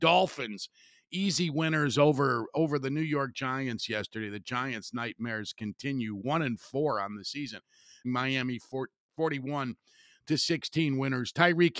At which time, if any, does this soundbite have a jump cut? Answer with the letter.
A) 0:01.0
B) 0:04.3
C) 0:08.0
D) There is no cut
C